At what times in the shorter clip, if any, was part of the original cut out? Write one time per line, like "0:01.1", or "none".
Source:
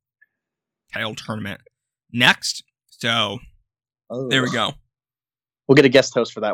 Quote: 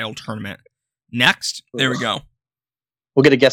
0:01.7